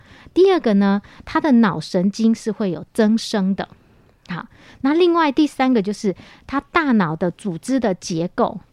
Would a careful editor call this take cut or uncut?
uncut